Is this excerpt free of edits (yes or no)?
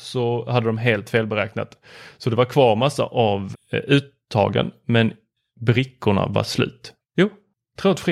no